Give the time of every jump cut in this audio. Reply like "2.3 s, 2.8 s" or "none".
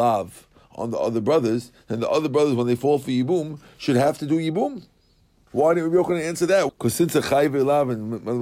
5.5 s, 6.7 s